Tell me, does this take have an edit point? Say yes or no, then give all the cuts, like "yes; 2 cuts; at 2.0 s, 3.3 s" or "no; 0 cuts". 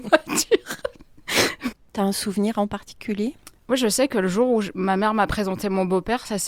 yes; 1 cut; at 1.7 s